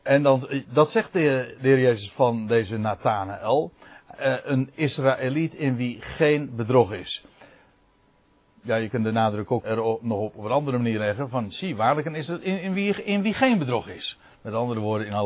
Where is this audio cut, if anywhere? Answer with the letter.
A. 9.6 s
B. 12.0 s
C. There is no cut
A